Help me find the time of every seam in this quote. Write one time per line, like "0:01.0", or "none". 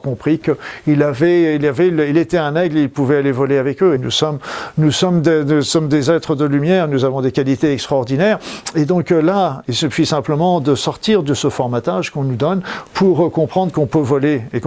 0:04.0